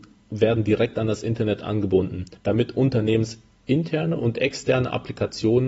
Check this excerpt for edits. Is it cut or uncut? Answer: cut